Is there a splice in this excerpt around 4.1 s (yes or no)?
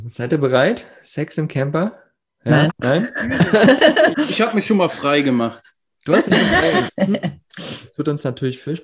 yes